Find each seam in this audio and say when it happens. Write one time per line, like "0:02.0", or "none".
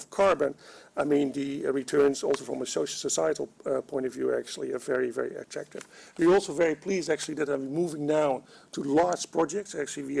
none

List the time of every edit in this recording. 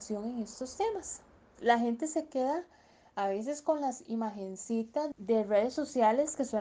0:05.1

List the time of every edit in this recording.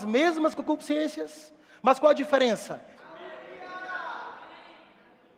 0:03.0

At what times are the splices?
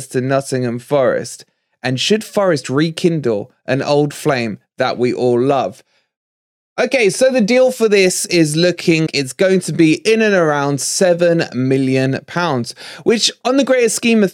0:09.1

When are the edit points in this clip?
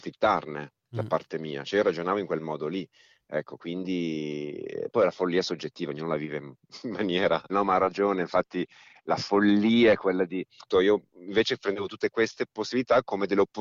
0:07.5

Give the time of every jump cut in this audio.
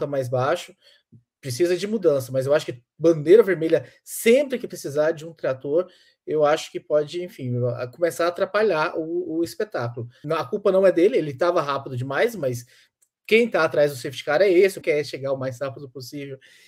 0:10.2
0:14.8

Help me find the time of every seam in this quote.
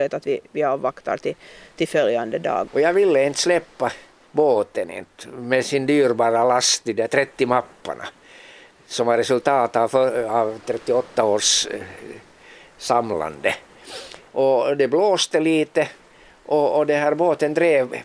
0:02.7
0:14.3

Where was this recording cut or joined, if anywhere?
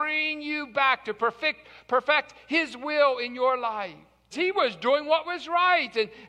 0:04.3

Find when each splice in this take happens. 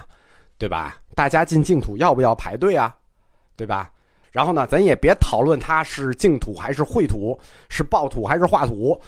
0:04.2

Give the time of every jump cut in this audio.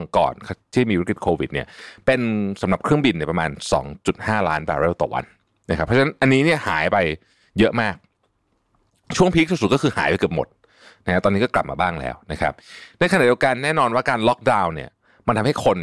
none

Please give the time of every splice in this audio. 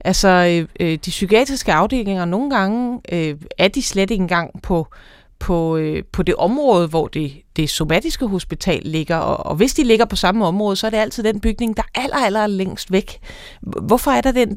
none

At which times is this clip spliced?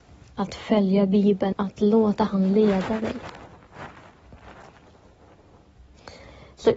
0:01.5

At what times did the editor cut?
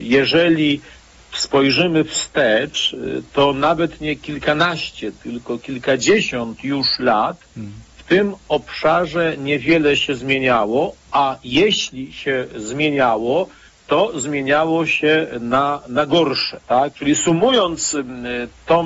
0:16.9

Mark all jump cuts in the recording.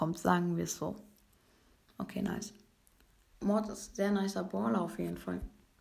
0:03.3

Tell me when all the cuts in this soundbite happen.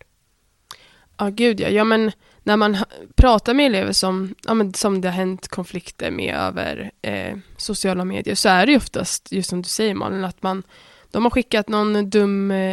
none

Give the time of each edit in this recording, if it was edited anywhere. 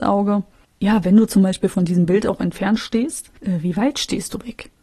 0:03.3

